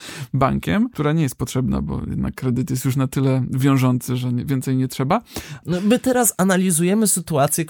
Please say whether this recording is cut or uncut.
cut